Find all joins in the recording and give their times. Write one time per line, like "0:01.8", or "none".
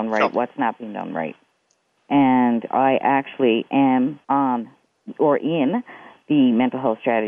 0:02.0
0:04.2